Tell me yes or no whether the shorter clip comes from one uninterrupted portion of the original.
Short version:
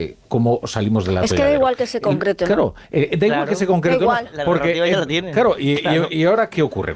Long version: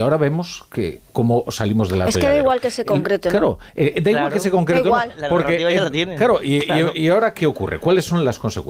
yes